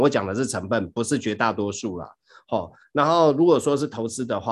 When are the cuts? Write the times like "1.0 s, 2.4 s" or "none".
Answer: none